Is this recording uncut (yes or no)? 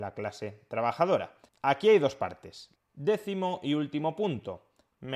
no